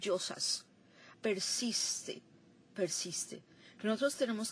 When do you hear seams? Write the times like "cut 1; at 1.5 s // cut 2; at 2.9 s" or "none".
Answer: cut 1; at 1.1 s